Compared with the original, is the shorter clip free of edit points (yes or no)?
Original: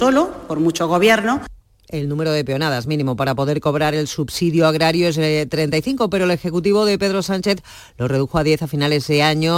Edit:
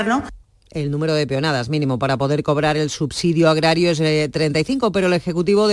yes